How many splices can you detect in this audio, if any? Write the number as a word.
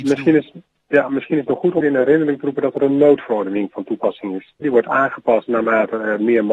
two